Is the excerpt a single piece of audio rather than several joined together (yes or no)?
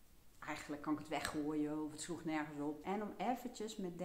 no